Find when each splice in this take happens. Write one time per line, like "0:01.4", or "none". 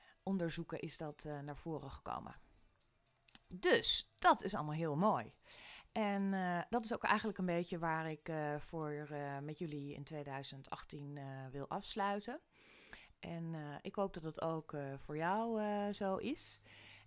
0:13.1

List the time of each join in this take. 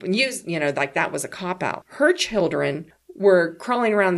0:01.8

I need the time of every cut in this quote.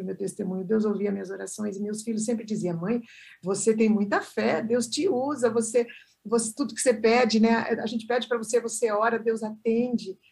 none

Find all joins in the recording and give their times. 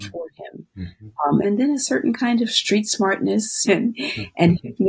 0:01.4
0:03.7

